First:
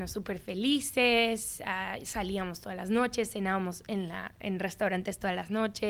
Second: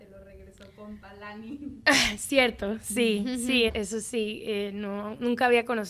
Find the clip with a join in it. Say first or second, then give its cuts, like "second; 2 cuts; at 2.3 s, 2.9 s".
second; 1 cut; at 3.7 s